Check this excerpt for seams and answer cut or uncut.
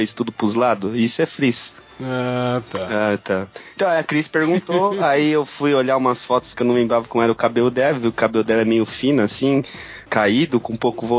uncut